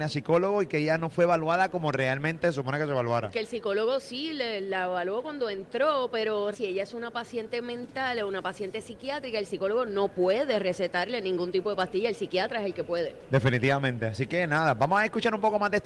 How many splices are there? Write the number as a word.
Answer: one